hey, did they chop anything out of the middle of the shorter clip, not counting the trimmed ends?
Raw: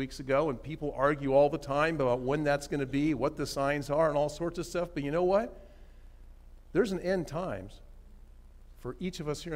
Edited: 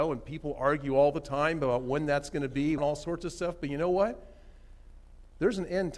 yes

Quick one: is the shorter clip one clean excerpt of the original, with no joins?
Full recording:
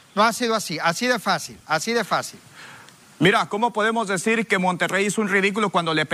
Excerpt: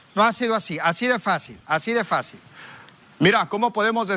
yes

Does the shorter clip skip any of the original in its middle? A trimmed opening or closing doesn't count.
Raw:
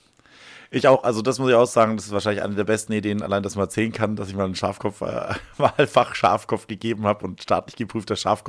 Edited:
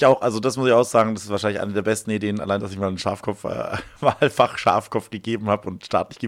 yes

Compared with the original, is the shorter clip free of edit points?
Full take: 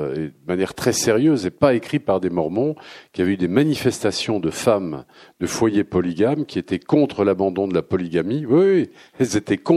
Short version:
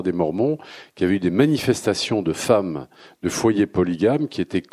yes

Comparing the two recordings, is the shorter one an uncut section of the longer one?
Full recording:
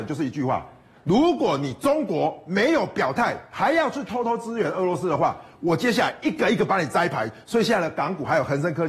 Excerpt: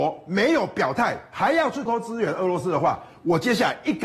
no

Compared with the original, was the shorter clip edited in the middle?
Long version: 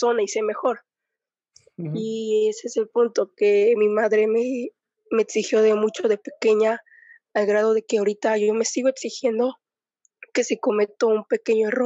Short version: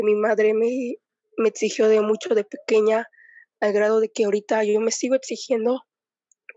no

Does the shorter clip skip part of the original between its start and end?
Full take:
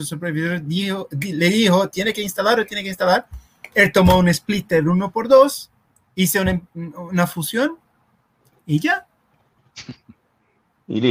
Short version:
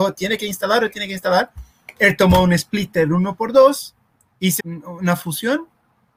yes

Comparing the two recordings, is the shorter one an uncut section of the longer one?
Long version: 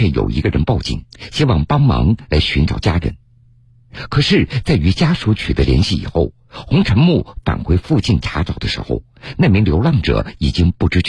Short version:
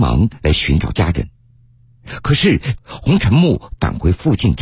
no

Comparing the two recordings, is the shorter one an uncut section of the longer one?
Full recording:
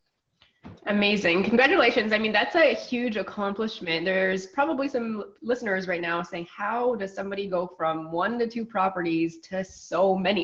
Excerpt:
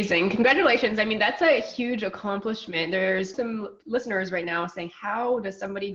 no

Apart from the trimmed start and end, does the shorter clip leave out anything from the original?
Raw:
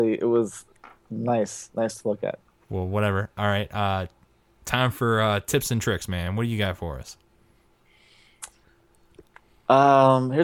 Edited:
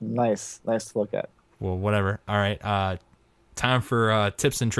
no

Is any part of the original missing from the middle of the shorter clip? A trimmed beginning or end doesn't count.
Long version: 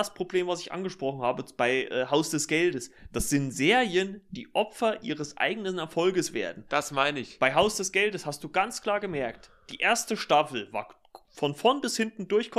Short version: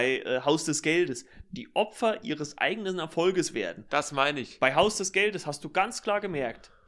yes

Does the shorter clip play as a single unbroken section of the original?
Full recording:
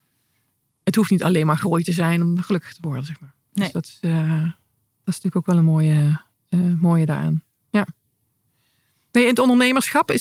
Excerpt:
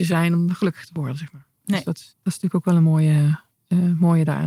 no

